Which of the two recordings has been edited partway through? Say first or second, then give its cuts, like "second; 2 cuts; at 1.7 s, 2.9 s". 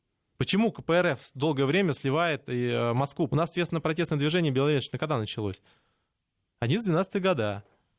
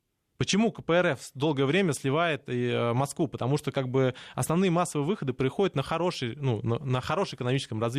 first; 1 cut; at 3.3 s